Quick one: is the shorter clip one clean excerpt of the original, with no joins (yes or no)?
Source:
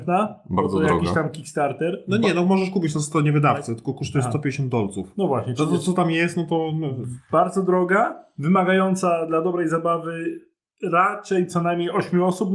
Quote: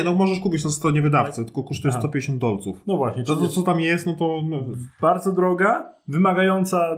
yes